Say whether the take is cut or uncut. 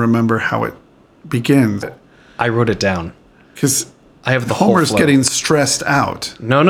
cut